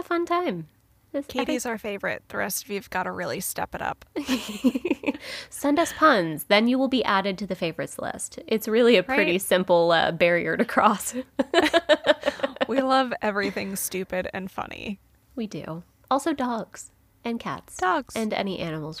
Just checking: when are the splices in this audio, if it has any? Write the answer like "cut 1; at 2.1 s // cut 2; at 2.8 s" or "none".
none